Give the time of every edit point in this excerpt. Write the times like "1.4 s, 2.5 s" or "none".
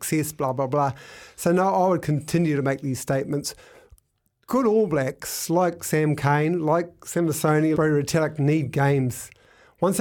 7.7 s